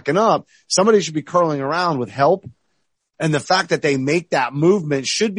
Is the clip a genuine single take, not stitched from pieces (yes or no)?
yes